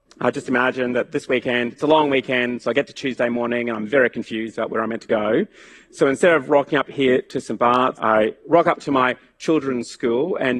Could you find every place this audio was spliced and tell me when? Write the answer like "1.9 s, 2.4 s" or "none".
8.0 s